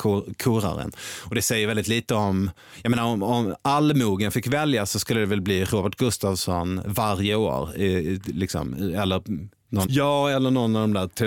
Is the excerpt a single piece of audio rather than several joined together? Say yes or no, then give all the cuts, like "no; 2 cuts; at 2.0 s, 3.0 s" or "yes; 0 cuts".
no; 1 cut; at 9.9 s